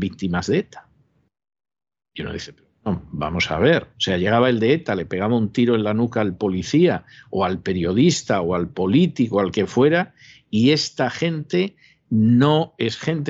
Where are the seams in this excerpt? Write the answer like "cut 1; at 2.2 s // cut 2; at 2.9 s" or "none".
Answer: cut 1; at 3.9 s